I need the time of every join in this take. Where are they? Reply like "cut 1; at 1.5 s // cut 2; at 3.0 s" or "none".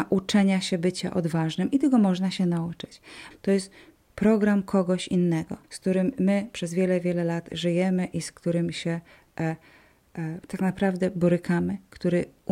cut 1; at 3.3 s // cut 2; at 5.6 s

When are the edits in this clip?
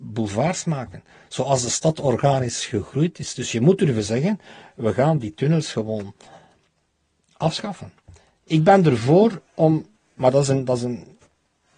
none

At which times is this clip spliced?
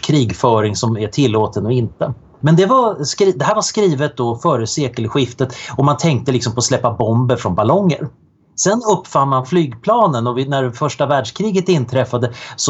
cut 1; at 2.4 s

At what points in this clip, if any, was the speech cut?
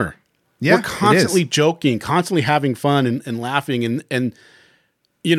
none

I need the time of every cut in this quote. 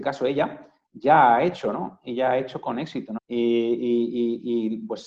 cut 1; at 3.2 s

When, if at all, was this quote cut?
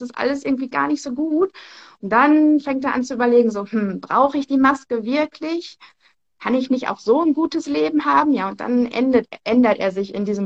none

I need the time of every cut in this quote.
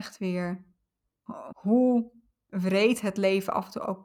cut 1; at 1.5 s

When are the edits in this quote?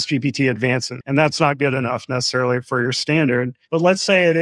cut 1; at 1.0 s

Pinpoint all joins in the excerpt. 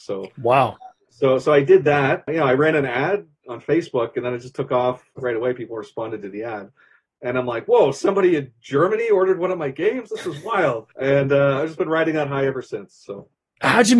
cut 1; at 2.3 s // cut 2; at 10.9 s

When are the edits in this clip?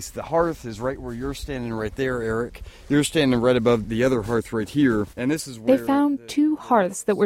cut 1; at 3.8 s // cut 2; at 5.1 s

